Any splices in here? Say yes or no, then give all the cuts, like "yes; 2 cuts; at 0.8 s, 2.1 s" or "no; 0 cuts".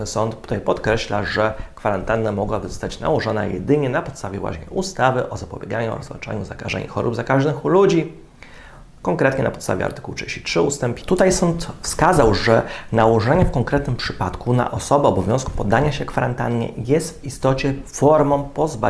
yes; 1 cut; at 11.0 s